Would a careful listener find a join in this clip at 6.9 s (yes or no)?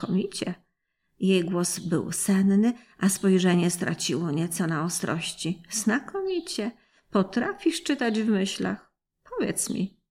no